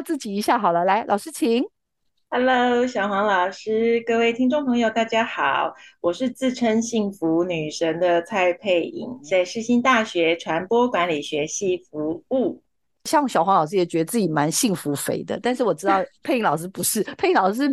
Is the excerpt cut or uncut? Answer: cut